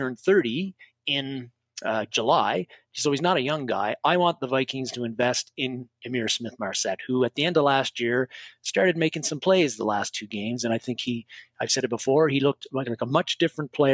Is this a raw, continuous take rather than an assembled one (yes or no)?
yes